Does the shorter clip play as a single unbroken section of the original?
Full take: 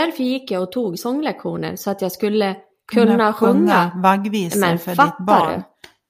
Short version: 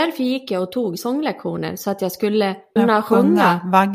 no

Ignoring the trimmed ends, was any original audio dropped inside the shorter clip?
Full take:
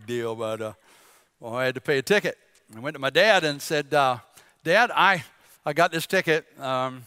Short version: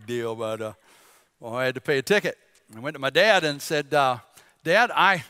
no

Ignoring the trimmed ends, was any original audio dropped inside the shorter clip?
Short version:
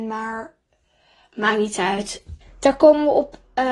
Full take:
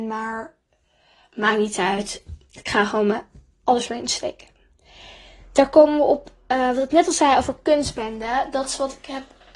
yes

